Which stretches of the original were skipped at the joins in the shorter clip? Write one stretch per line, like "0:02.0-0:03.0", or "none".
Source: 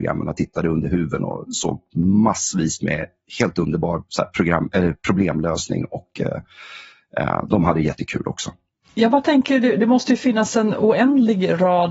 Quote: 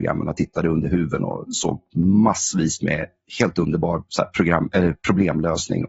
none